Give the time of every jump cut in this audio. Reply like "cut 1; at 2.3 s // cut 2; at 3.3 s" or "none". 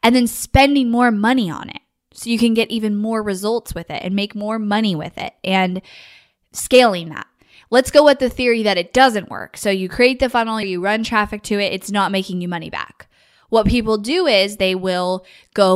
cut 1; at 10.6 s